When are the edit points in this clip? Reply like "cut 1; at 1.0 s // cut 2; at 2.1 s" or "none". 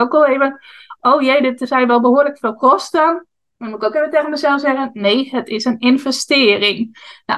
none